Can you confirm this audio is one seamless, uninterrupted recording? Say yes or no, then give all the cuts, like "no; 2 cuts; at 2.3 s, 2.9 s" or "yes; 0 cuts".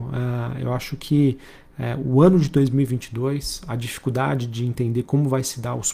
yes; 0 cuts